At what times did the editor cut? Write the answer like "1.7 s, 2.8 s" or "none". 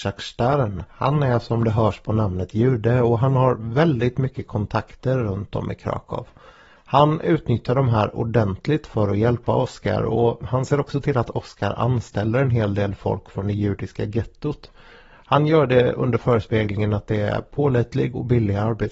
none